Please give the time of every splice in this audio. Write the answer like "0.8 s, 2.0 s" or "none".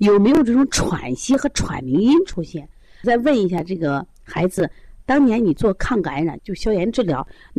3.0 s, 6.4 s